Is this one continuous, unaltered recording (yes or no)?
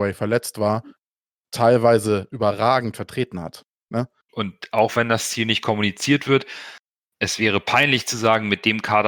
no